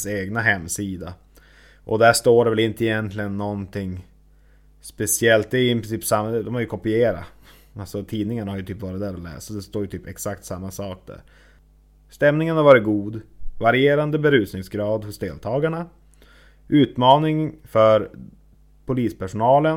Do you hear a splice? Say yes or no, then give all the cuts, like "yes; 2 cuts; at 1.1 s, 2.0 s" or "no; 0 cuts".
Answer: no; 0 cuts